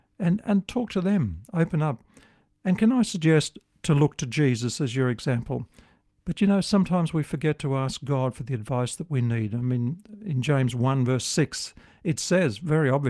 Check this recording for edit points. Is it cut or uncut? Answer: cut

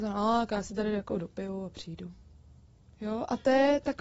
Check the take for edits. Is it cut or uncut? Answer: uncut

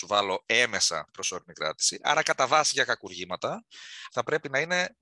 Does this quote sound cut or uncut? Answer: cut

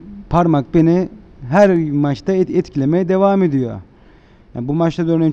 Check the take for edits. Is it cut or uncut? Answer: uncut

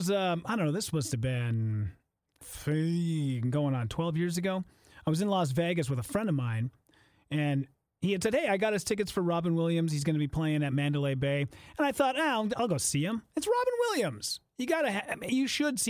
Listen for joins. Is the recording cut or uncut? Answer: uncut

